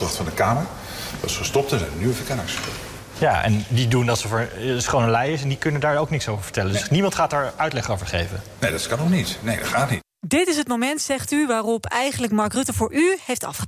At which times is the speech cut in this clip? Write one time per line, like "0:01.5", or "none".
none

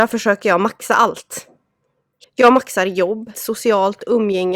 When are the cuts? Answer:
0:02.2
0:03.3

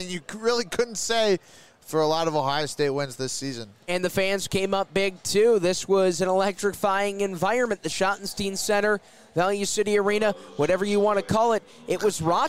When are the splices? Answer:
none

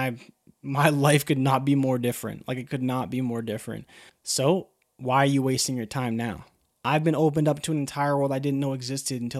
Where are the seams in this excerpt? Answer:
0:04.1
0:06.8

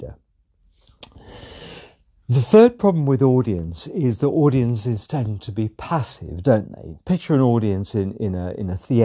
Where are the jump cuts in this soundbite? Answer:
none

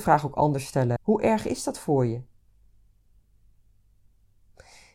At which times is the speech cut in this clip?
0:01.0

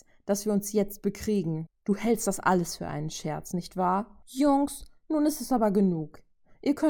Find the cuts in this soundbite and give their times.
0:01.7
0:04.2

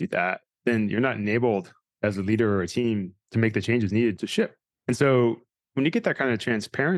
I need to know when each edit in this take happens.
none

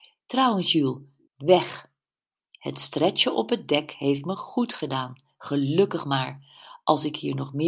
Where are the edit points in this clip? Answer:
0:01.3

